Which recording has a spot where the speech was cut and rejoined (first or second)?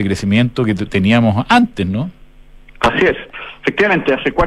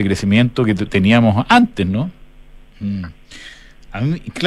second